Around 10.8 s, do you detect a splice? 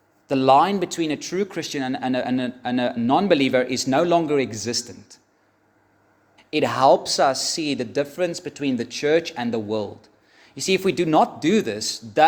no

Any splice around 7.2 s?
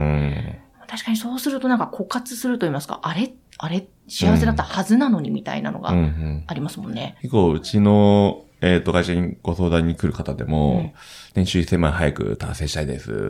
yes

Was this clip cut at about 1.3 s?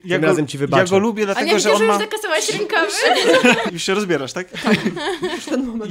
no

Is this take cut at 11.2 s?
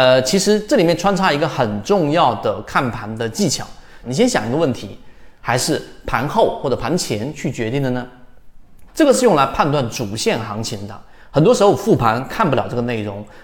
no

